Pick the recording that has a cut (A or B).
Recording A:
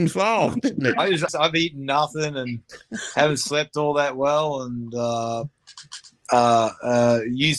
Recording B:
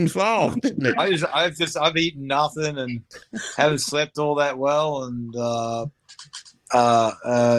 A